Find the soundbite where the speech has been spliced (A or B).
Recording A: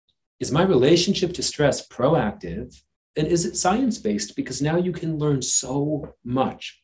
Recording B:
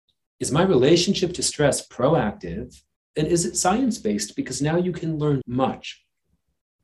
B